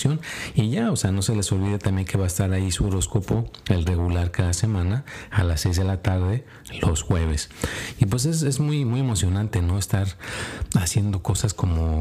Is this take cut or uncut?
uncut